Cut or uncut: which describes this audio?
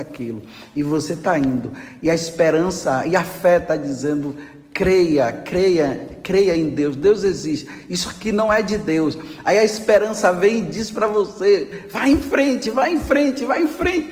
uncut